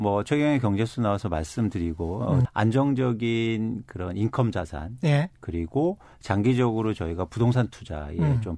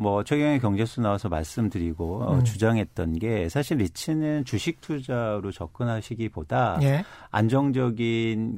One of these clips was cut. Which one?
first; 1 cut; at 2.5 s

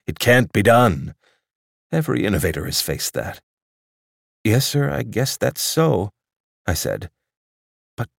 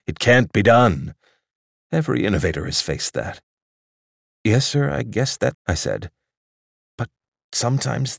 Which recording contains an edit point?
second; 1 cut; at 5.5 s

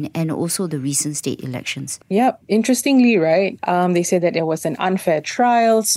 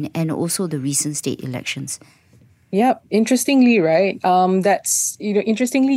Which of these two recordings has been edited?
first; 2 cuts; at 2.0 s, 3.6 s

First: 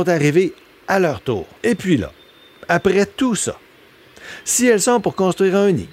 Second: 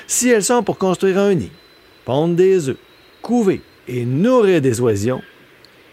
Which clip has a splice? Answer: first; 1 cut; at 1.6 s

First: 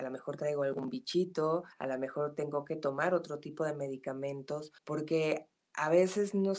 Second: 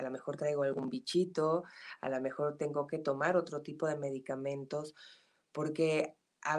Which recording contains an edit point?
first; 2 cuts; at 1.7 s, 4.8 s

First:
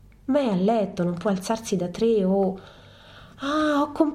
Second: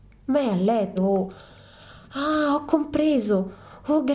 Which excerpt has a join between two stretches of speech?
second; 1 cut; at 1.0 s

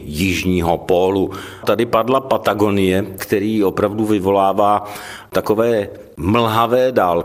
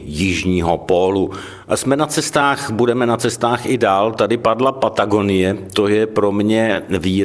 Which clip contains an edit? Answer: first; 2 cuts; at 1.6 s, 3.2 s

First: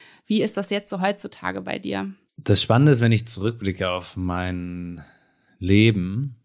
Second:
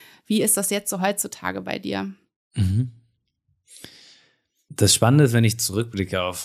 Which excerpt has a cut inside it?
first; 1 cut; at 2.3 s

